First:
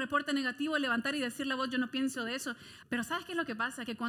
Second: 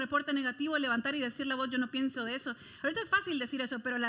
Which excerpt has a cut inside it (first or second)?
first